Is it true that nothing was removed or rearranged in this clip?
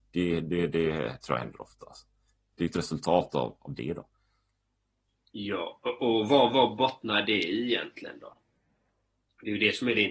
yes; 0 cuts

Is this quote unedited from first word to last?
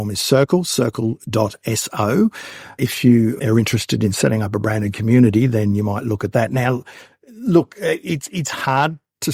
yes; 0 cuts

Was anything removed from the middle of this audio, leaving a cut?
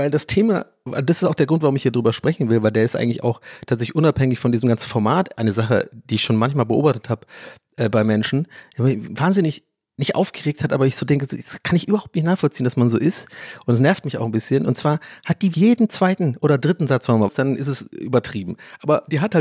yes; 2 cuts; at 15.5 s, 17.3 s

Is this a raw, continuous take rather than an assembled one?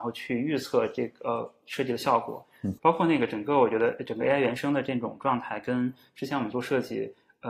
no; 1 cut; at 2.8 s

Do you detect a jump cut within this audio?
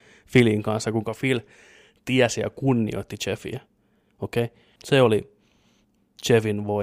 yes; 1 cut; at 4.8 s

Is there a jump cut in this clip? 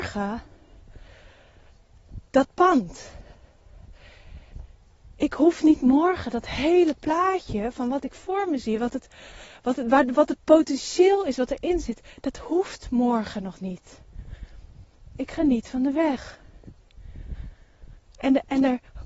no; 0 cuts

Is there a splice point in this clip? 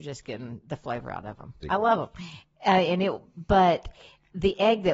yes; 1 cut; at 1.6 s

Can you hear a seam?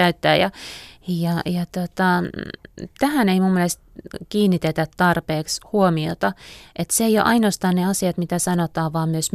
no; 0 cuts

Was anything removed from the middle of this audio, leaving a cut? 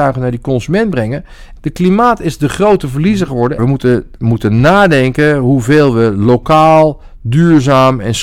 yes; 2 cuts; at 1.6 s, 3.6 s

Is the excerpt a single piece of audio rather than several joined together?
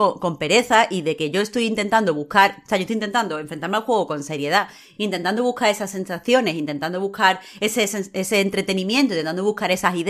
yes; 0 cuts

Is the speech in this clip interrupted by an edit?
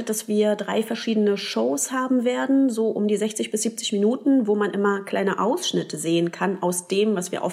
no; 0 cuts

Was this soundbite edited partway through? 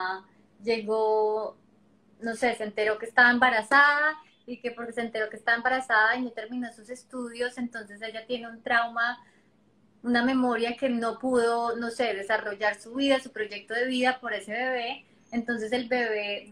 no; 0 cuts

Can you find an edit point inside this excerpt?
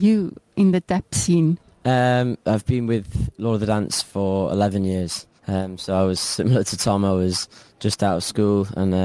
yes; 1 cut; at 5.4 s

